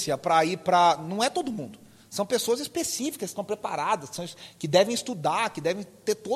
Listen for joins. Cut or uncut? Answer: uncut